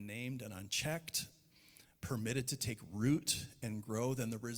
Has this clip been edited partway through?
no; 0 cuts

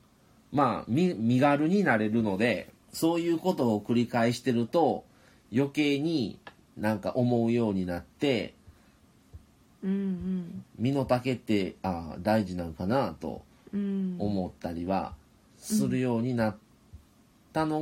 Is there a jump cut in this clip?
yes; 1 cut; at 2.8 s

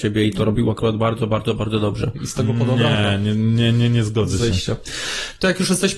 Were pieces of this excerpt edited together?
no; 0 cuts

